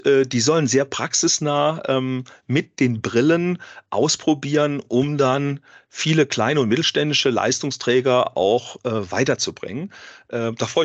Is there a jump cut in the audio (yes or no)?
no